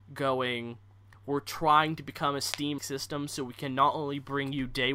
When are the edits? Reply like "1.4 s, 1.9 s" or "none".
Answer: 1.1 s, 2.8 s